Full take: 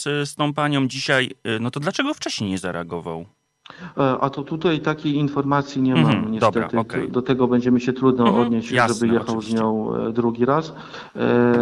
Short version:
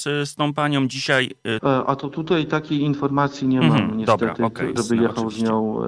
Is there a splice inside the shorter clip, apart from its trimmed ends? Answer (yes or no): yes